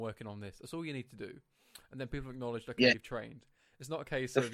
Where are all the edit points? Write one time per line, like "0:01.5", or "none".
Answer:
none